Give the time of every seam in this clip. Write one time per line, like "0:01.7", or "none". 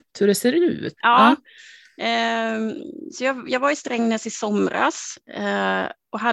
0:01.0